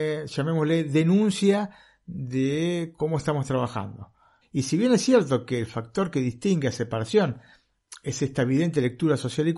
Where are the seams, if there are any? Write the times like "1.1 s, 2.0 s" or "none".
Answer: 4.4 s

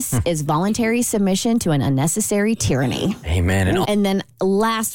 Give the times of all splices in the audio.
3.8 s

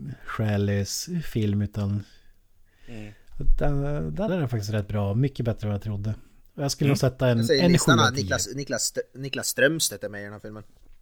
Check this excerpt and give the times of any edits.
4.3 s

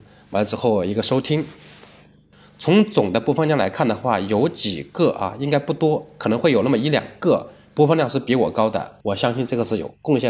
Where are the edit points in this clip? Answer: 9.0 s

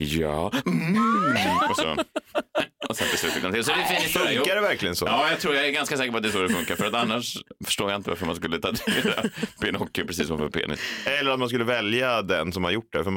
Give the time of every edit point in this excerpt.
none

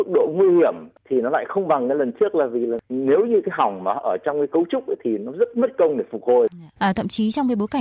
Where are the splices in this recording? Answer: 6.8 s

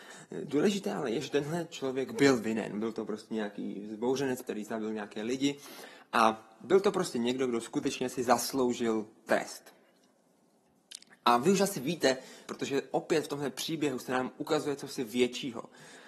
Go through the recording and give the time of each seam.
4.4 s, 12.5 s

